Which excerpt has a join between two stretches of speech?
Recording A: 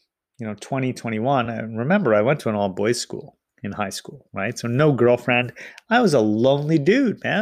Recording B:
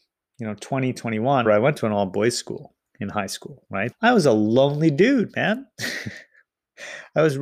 B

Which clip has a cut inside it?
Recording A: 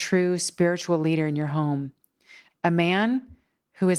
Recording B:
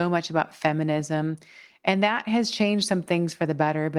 A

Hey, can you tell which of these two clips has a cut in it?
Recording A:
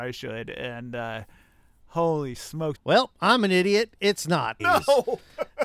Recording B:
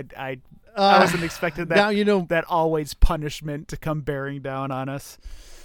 A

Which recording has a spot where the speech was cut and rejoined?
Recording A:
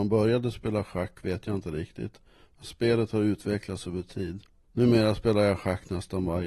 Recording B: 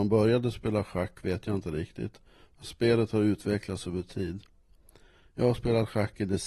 A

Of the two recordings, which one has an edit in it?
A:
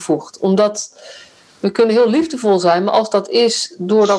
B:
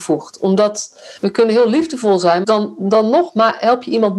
B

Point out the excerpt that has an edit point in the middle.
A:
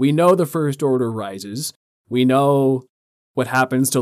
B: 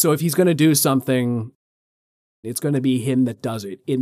B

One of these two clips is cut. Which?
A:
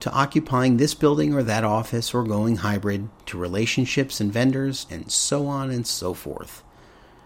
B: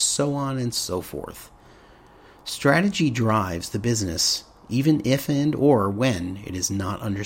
A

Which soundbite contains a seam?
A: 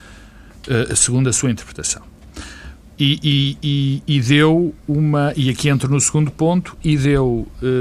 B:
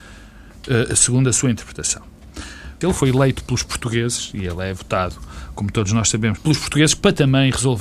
B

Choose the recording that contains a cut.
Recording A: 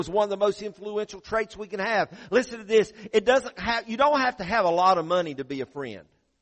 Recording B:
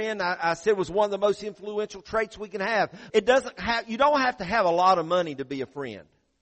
B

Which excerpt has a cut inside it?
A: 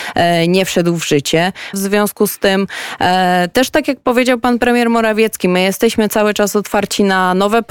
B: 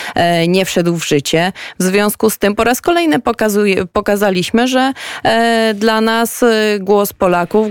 A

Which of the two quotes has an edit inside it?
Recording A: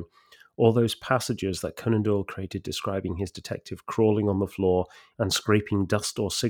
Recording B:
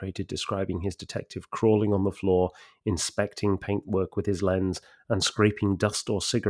A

